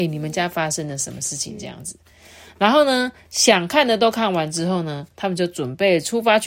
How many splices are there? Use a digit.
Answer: 0